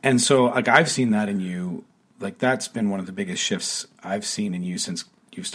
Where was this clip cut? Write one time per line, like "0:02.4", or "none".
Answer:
none